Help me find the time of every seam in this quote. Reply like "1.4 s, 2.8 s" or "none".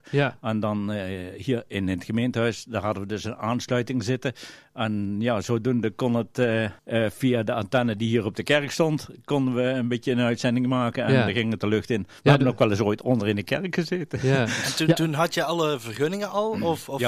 6.8 s